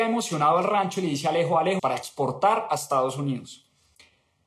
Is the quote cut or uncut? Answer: cut